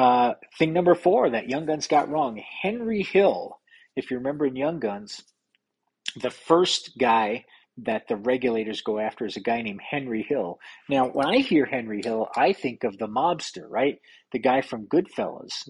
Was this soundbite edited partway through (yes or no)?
no